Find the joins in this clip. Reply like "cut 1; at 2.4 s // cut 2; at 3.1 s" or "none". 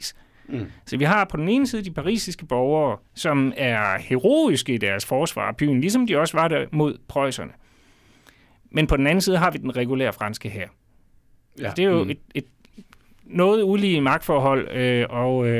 none